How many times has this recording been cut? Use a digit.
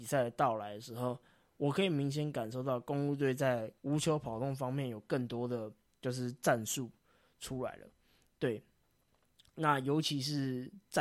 1